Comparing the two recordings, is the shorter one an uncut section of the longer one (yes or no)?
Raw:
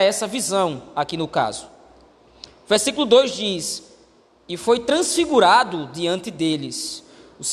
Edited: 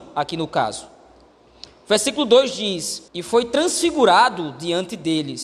no